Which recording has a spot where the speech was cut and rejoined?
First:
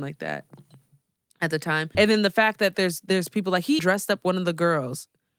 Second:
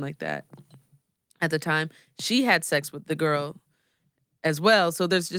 first; 2 cuts; at 1.9 s, 3.8 s

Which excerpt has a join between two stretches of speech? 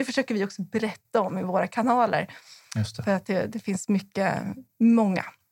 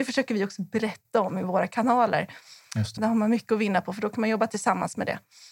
second; 1 cut; at 3.0 s

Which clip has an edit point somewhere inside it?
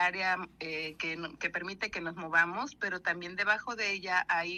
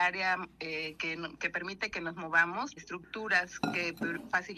second; 1 cut; at 2.8 s

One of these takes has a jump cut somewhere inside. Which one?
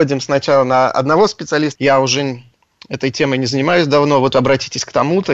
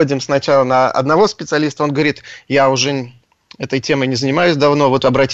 first; 1 cut; at 1.8 s

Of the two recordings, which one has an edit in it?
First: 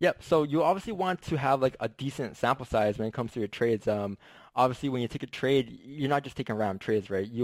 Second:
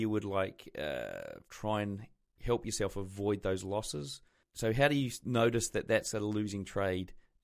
second; 1 cut; at 1.4 s

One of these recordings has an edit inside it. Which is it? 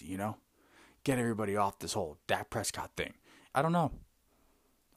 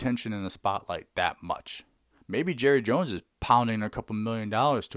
first; 1 cut; at 3.5 s

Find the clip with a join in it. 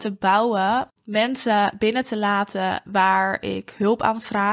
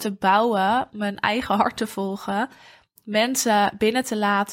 first; 1 cut; at 0.9 s

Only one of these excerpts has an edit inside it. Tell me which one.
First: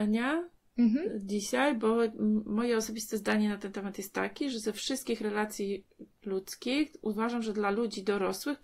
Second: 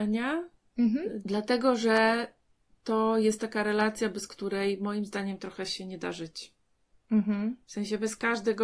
second; 1 cut; at 1.2 s

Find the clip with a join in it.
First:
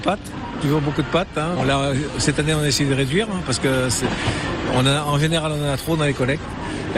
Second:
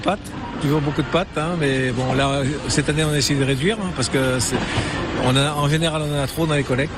first; 1 cut; at 1.6 s

